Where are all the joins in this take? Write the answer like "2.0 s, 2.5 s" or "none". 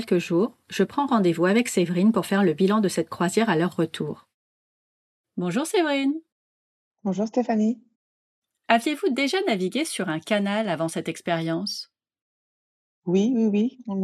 none